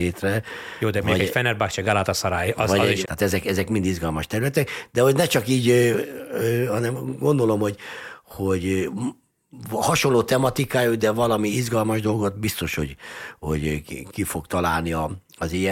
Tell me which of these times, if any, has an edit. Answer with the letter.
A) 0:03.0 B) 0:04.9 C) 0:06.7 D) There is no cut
A